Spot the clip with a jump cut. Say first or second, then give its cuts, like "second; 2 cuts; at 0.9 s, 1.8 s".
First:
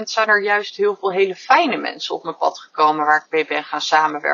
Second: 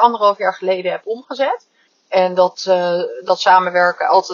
second; 1 cut; at 1.9 s